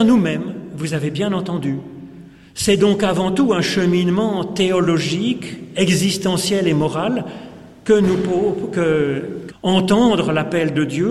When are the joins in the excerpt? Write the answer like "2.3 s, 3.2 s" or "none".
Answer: 9.5 s